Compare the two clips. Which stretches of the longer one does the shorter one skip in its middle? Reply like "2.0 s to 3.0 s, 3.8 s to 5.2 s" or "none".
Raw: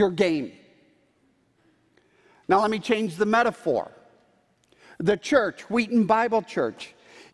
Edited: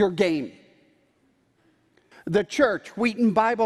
2.1 s to 4.8 s